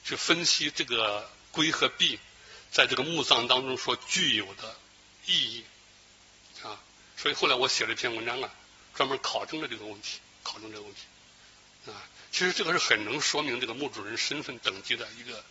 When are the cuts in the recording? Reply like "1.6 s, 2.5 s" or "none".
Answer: none